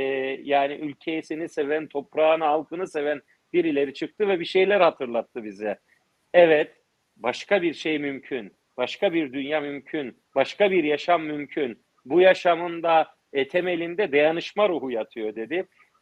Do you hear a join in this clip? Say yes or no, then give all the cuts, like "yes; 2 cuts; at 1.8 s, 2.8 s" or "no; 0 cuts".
no; 0 cuts